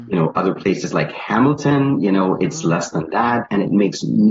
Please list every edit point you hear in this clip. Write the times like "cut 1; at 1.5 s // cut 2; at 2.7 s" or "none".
none